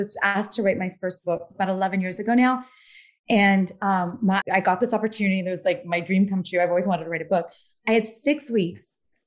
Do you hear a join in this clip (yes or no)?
yes